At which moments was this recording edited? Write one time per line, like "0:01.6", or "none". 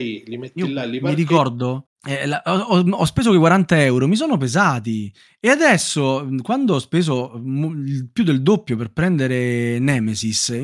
0:01.9